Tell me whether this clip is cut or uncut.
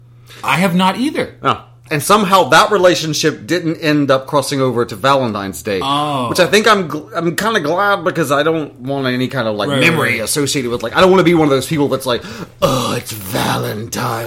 cut